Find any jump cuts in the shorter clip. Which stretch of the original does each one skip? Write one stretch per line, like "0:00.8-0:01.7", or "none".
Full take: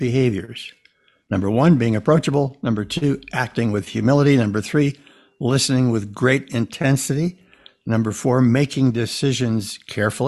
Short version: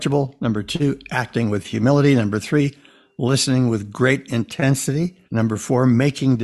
0:07.5-0:07.8

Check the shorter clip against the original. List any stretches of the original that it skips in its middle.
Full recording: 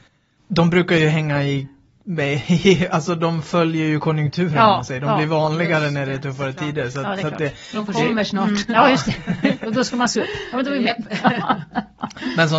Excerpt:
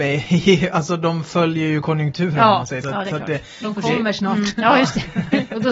0:05.0-0:06.9

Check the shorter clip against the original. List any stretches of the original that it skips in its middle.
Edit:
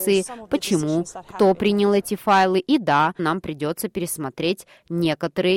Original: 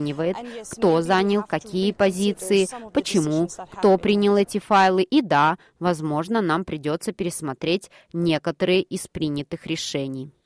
0:05.6-0:06.4

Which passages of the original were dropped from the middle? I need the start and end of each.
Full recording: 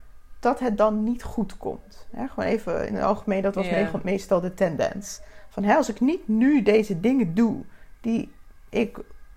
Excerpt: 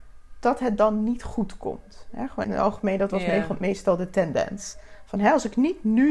0:02.4-0:02.9

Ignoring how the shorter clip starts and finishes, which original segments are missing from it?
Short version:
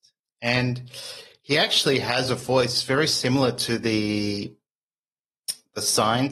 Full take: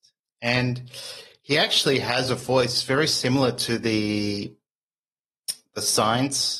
none

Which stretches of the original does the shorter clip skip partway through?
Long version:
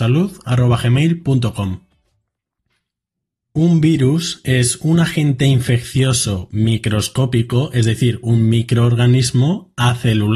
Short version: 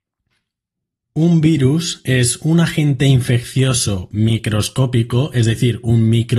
none

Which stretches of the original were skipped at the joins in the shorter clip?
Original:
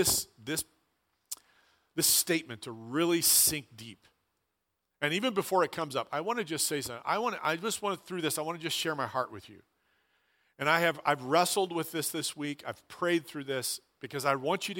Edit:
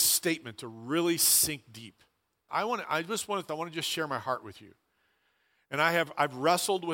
0:04.5-0:07.0
0:08.0-0:08.4

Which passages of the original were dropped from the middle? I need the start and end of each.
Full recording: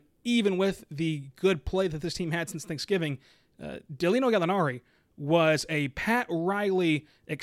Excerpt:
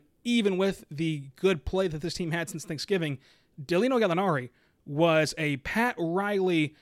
0:03.5-0:03.8

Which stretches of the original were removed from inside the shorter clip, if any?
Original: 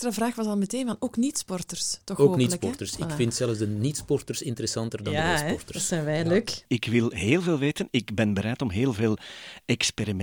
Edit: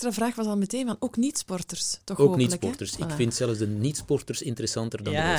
none

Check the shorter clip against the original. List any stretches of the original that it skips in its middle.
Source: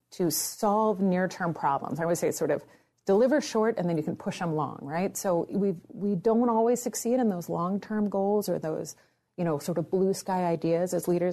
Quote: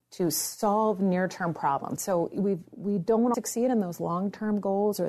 0:02.0-0:05.1
0:06.5-0:06.8

